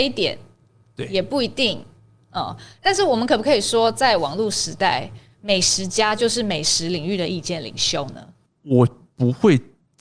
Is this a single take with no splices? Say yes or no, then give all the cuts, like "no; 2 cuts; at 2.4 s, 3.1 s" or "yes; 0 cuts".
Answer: yes; 0 cuts